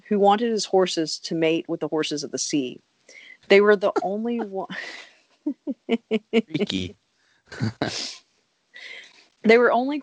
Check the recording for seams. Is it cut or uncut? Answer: uncut